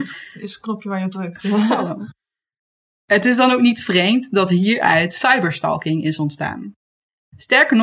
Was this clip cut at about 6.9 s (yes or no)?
no